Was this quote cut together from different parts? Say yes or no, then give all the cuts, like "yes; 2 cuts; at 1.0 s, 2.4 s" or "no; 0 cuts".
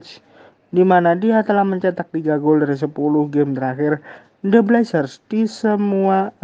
no; 0 cuts